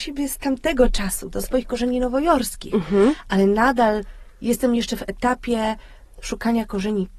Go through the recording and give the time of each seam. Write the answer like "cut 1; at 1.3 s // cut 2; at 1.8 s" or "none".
none